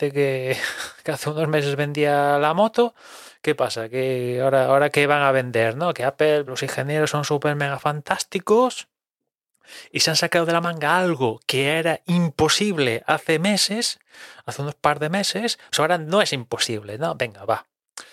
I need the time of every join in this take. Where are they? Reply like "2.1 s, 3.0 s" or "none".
6.5 s, 15.7 s